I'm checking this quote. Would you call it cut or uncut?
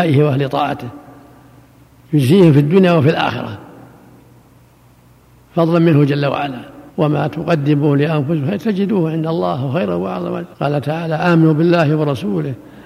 cut